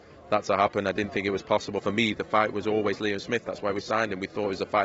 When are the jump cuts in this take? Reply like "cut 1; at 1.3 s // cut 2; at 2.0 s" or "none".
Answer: cut 1; at 1.8 s